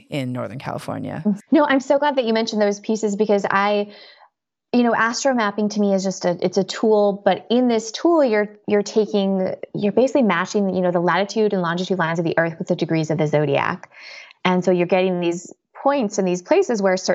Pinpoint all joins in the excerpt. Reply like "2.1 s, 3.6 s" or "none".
1.4 s